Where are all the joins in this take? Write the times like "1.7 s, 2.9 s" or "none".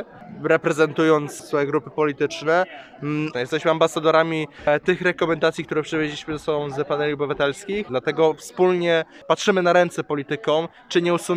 3.3 s, 7.9 s